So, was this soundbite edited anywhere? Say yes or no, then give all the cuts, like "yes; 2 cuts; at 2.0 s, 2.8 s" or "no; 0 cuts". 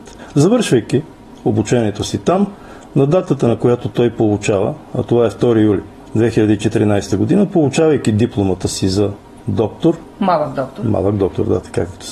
no; 0 cuts